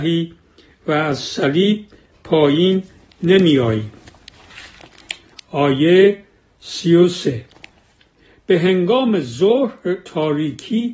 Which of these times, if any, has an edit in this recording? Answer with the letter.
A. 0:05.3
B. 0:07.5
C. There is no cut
A